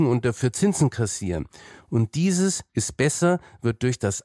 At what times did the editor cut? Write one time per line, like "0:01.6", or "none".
none